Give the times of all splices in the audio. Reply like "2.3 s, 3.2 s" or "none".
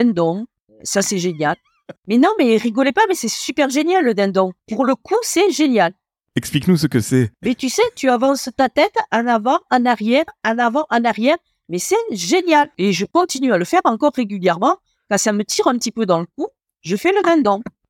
none